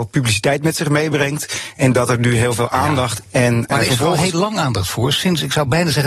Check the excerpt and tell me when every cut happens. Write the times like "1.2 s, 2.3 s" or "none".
3.2 s